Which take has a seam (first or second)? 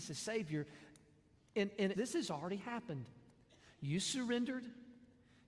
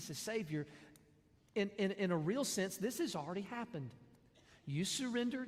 first